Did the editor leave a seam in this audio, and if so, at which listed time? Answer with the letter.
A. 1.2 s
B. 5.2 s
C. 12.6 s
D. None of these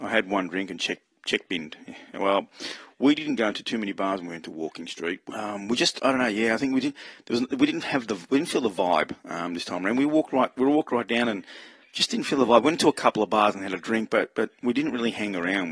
D